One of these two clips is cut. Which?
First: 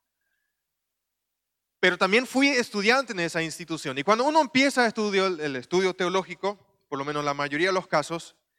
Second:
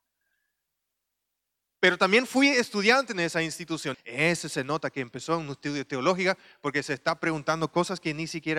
second; 1 cut; at 3.9 s

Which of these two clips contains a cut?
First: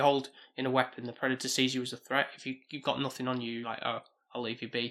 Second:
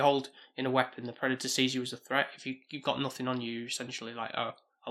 first; 1 cut; at 3.6 s

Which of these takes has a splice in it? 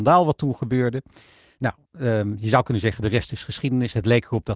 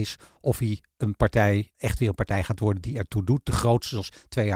second; 1 cut; at 1.7 s

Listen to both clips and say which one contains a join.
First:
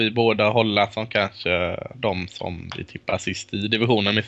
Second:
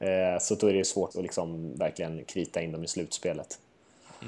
second; 1 cut; at 1.1 s

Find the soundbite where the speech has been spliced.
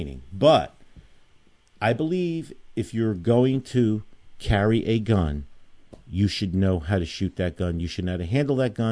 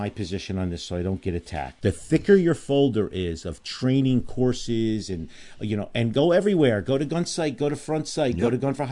second; 1 cut; at 1.8 s

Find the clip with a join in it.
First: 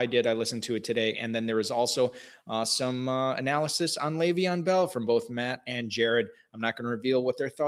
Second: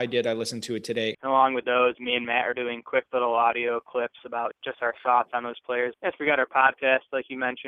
second; 3 cuts; at 1.1 s, 4.5 s, 5.9 s

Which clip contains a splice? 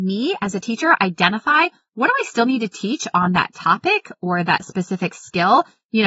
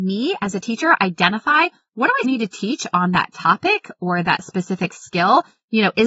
second; 1 cut; at 2.2 s

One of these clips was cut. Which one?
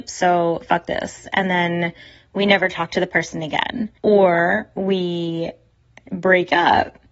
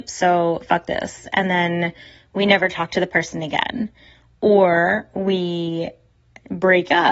first; 1 cut; at 4.0 s

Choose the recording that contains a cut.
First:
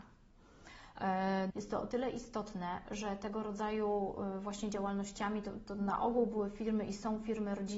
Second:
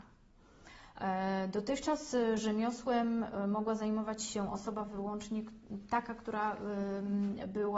first; 1 cut; at 1.5 s

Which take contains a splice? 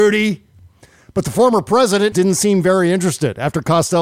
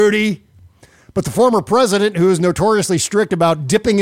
first; 1 cut; at 2.1 s

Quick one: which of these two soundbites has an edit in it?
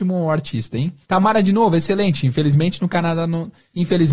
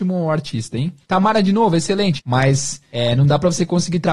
second; 1 cut; at 2.2 s

